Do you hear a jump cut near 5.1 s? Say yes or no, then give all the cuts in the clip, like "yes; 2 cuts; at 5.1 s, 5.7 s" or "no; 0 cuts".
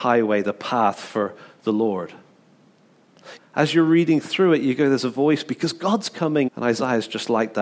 no; 2 cuts; at 3.4 s, 6.5 s